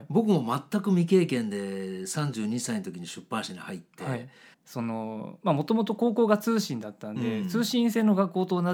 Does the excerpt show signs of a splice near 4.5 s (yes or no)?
yes